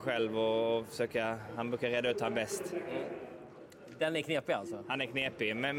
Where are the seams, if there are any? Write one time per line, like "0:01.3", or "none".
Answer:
none